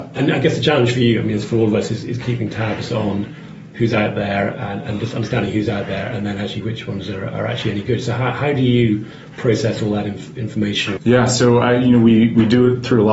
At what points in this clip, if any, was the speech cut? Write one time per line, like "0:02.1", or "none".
0:11.0